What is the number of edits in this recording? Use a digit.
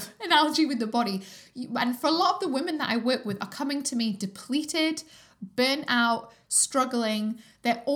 1